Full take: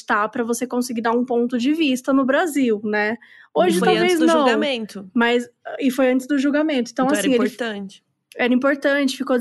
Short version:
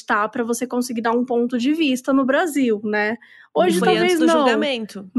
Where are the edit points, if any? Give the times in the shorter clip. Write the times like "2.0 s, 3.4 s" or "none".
none